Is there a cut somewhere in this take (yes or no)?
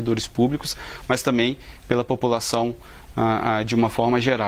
no